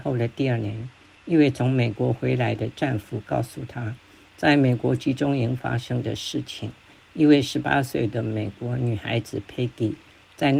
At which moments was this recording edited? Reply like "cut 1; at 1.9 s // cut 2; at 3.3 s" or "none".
none